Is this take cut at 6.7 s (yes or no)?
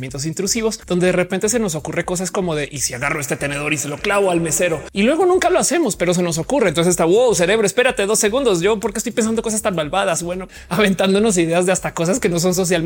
no